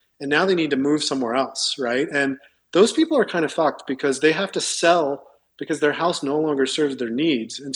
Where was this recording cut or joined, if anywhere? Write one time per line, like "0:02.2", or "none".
none